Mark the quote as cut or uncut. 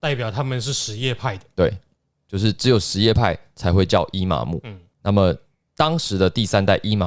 uncut